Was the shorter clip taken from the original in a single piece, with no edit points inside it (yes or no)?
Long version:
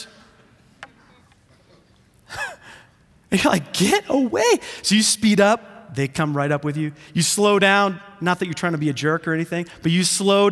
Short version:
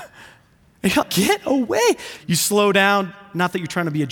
no